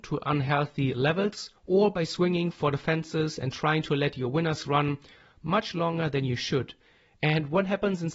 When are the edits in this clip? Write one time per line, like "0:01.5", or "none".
0:01.6